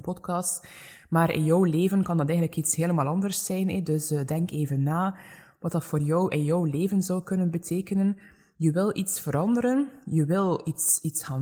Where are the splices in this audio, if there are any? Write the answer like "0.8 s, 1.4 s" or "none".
none